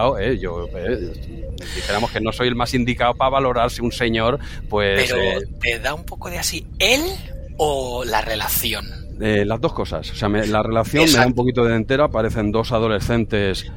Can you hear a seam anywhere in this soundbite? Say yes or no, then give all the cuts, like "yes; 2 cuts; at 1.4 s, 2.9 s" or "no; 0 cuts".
no; 0 cuts